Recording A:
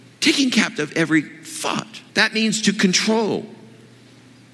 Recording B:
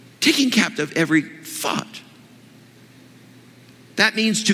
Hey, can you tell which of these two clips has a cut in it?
A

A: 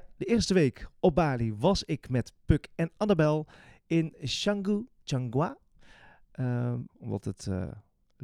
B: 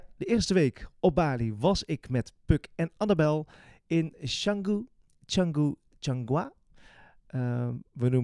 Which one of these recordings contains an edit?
A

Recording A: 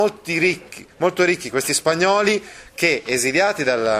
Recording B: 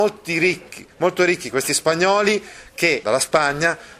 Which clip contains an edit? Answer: B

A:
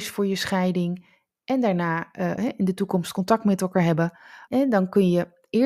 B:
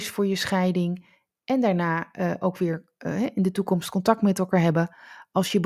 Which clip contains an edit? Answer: A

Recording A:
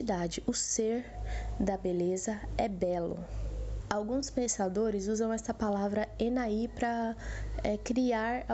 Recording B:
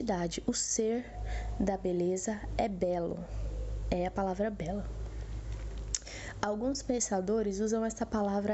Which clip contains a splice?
A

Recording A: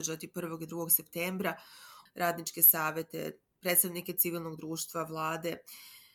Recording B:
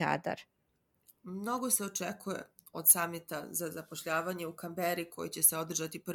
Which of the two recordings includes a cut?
A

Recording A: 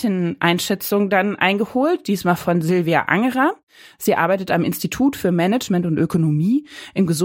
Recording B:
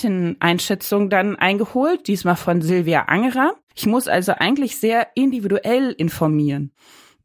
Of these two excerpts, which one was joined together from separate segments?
B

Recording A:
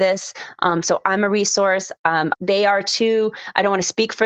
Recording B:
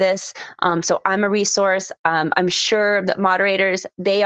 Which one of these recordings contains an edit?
A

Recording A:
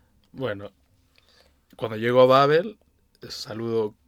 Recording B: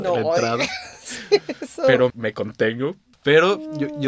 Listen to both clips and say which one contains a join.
B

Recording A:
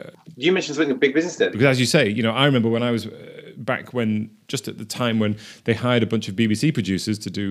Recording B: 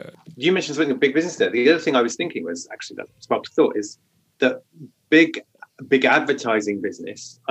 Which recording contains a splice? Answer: A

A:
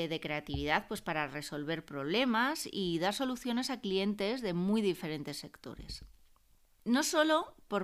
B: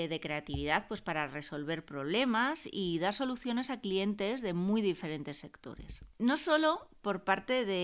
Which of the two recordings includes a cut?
B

